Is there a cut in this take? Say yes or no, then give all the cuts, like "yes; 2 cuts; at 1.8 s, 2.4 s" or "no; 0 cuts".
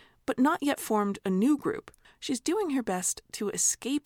yes; 1 cut; at 2.0 s